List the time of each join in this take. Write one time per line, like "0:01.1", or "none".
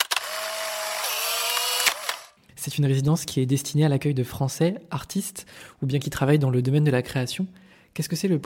0:02.4